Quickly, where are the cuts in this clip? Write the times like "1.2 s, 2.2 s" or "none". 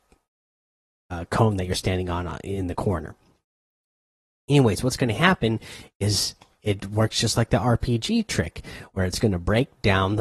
none